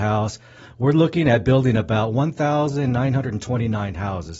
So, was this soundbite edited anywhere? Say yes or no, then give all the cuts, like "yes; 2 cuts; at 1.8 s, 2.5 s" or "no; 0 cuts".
no; 0 cuts